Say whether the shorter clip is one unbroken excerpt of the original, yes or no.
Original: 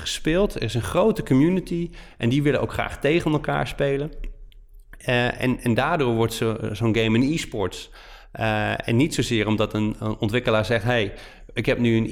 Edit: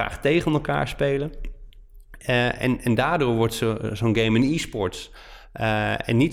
yes